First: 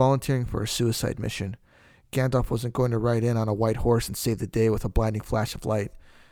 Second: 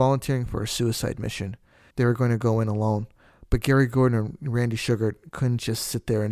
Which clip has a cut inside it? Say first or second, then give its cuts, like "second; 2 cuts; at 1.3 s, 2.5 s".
second; 1 cut; at 1.9 s